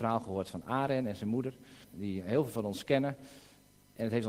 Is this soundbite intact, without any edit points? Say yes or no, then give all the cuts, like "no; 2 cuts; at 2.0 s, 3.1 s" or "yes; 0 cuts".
no; 1 cut; at 1.8 s